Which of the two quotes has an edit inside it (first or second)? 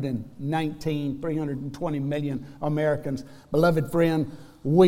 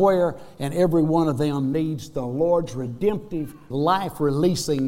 second